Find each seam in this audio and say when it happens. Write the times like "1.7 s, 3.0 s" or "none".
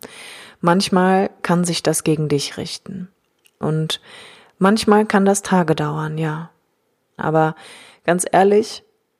3.6 s, 7.2 s